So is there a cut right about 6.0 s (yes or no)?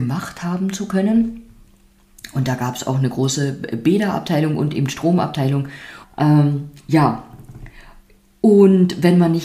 yes